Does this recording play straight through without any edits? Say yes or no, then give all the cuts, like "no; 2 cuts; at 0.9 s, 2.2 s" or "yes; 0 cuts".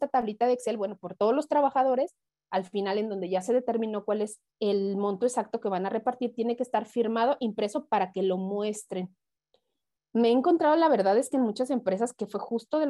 no; 1 cut; at 4.5 s